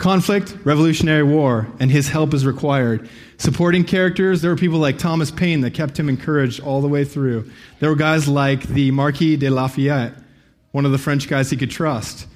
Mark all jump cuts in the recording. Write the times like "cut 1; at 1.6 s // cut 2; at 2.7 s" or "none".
none